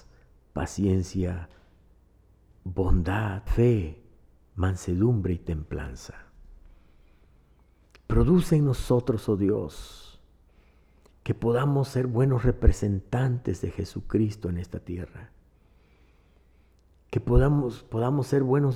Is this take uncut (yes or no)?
no